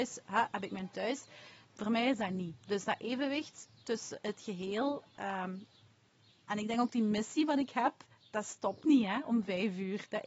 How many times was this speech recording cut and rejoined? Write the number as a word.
one